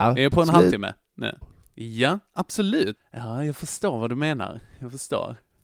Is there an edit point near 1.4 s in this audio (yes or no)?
yes